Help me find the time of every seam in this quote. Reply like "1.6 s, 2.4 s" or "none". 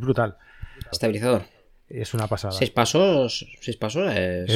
0.9 s